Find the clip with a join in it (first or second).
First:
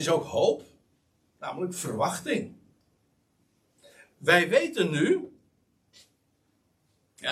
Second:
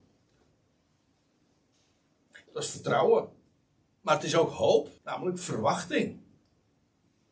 second